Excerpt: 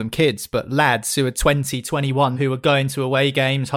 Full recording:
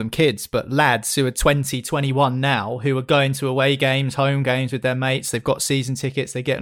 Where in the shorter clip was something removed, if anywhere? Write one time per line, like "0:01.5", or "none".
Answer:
0:02.3